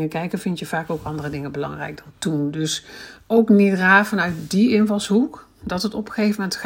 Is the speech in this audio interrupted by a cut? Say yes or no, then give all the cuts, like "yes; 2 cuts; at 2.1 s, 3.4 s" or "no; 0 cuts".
no; 0 cuts